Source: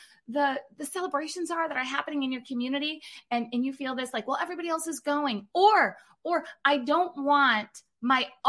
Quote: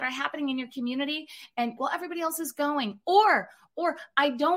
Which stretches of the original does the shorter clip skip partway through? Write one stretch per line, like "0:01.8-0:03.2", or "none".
0:03.5-0:04.2